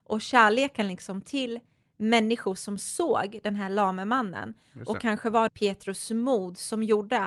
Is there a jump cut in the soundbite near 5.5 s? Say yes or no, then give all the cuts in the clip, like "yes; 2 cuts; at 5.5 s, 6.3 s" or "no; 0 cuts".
yes; 1 cut; at 5.5 s